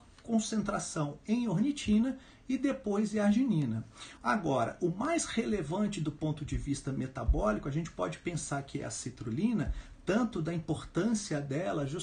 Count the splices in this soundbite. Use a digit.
1